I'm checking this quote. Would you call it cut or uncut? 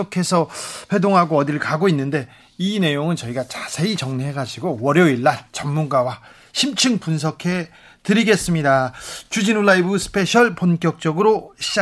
uncut